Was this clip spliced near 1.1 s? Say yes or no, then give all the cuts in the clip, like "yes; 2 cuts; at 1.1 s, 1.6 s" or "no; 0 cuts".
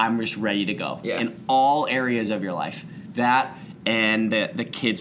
no; 0 cuts